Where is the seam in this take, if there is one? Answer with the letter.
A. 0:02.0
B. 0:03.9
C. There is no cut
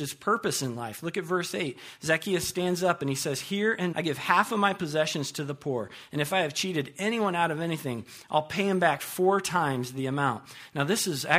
B